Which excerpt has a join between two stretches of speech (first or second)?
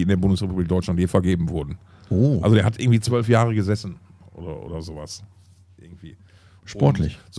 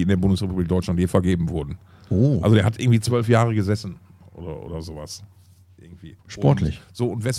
second